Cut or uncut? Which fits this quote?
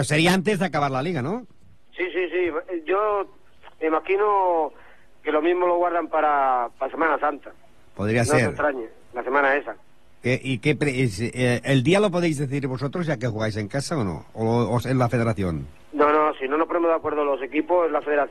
uncut